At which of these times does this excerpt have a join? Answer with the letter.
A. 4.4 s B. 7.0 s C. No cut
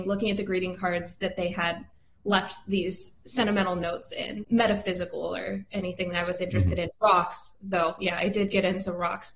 A